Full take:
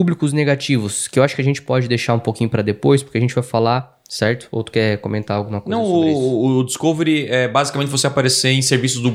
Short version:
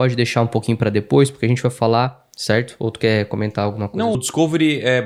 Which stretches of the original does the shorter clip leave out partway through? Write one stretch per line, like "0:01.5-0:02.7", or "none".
0:05.9-0:06.6